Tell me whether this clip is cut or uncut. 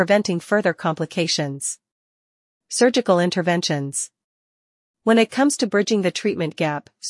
uncut